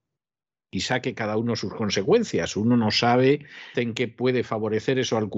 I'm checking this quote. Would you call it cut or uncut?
cut